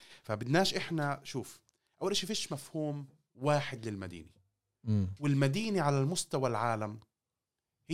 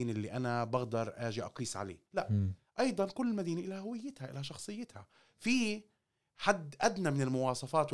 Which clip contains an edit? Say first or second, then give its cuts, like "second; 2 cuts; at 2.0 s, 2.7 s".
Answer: second; 1 cut; at 2.1 s